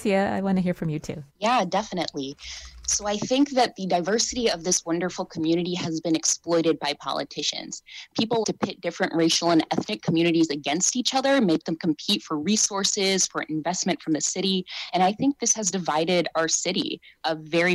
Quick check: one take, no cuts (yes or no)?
no